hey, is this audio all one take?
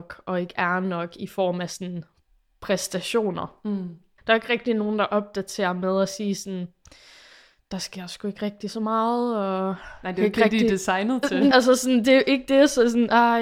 no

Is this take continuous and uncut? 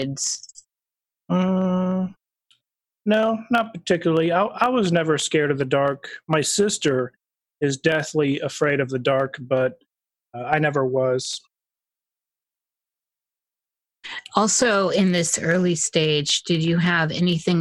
yes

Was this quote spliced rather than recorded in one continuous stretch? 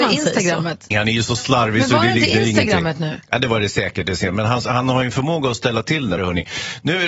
yes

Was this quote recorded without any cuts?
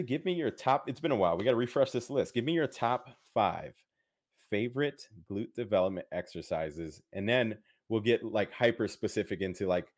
yes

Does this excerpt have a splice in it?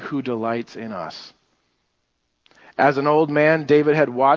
no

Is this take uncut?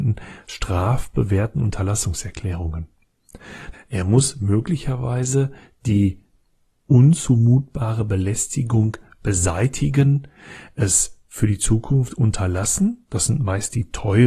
no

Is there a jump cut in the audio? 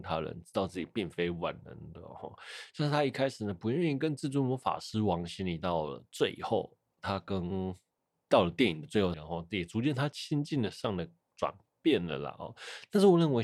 yes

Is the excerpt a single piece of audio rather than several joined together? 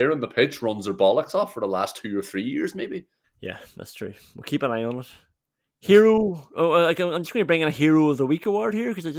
no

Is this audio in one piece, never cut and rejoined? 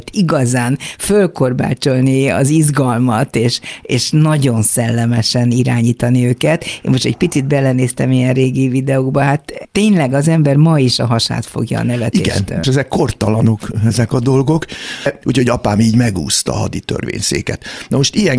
no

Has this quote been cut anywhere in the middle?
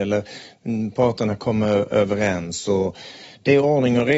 no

